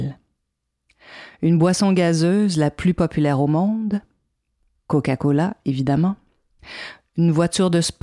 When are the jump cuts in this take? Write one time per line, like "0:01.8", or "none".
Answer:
none